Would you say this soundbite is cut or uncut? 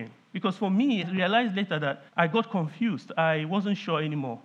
cut